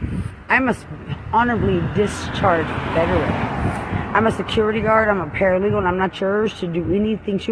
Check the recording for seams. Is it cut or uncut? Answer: uncut